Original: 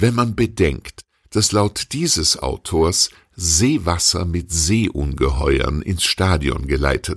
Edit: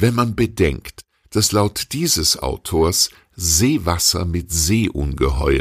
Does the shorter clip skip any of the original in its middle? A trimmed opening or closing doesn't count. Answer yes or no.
no